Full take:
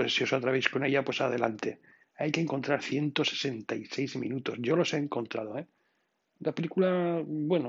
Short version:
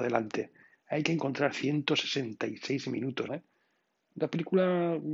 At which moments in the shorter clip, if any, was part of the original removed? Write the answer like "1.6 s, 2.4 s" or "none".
3.3 s

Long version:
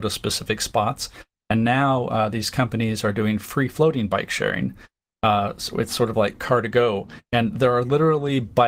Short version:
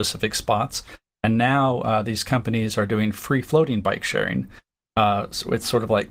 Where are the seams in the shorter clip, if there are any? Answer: none

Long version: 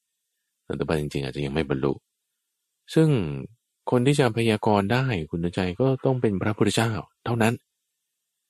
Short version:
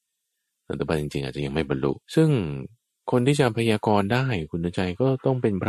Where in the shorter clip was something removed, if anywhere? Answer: 2.0 s

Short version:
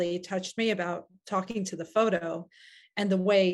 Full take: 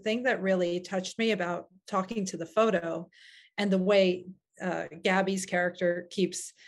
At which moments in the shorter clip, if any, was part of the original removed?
none

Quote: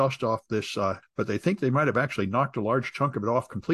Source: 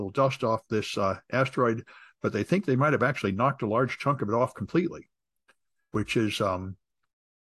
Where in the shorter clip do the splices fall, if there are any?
1.0 s

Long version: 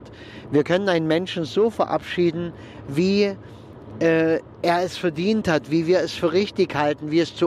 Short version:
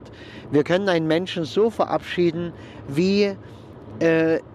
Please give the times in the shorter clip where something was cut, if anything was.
none

